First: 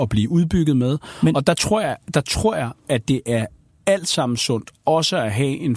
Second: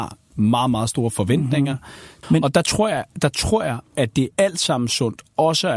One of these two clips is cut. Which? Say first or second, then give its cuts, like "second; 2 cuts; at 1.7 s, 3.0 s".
second; 2 cuts; at 2.2 s, 4.3 s